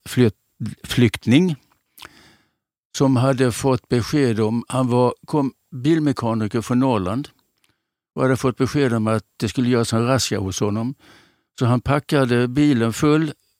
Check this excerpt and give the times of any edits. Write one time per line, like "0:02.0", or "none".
none